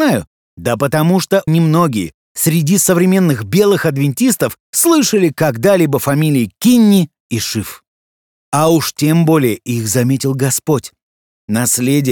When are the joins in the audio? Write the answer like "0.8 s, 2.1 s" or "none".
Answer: 1.5 s, 8.3 s